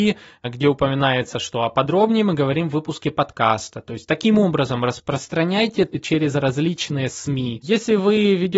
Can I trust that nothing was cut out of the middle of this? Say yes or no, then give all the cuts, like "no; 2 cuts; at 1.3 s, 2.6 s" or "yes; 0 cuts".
yes; 0 cuts